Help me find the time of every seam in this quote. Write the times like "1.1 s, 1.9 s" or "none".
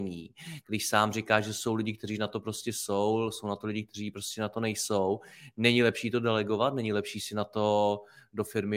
none